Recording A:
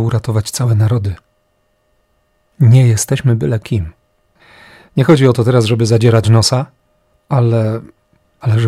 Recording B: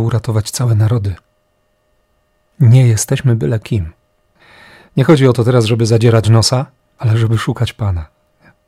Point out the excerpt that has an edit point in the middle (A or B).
B